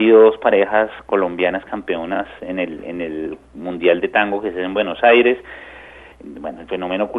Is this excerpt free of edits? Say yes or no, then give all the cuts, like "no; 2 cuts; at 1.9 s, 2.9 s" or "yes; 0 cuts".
no; 1 cut; at 6.1 s